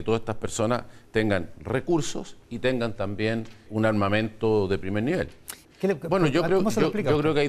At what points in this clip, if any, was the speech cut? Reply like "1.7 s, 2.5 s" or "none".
3.7 s, 5.6 s